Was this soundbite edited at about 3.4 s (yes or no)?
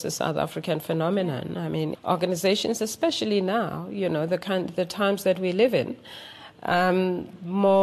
no